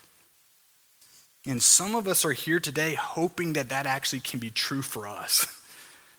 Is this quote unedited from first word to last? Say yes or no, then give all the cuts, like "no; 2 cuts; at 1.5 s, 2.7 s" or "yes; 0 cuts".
yes; 0 cuts